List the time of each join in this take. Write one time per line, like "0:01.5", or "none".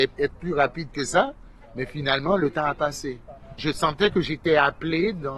0:03.6